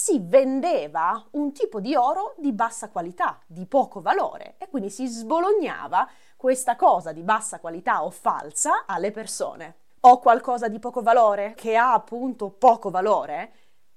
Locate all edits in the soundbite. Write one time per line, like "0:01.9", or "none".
0:10.0
0:11.6